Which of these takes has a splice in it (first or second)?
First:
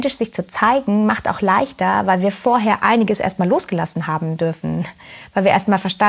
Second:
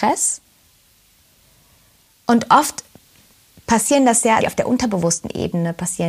second